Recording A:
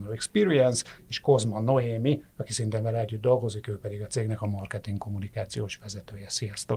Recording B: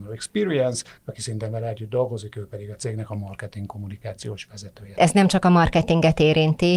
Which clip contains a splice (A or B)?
B